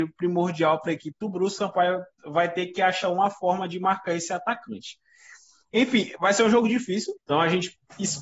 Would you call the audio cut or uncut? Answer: cut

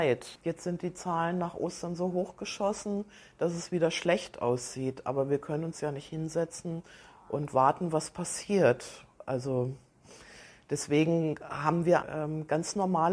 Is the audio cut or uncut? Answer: cut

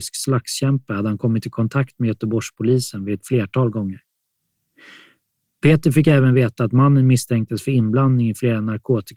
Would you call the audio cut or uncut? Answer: uncut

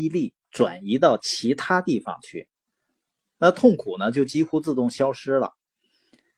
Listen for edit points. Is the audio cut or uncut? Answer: uncut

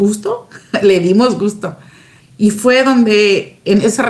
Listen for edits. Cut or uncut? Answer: cut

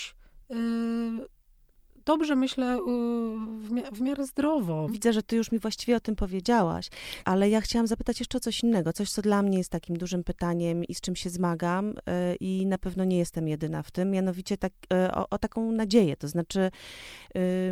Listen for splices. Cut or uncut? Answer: cut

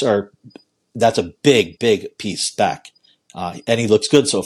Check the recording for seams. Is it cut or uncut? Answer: cut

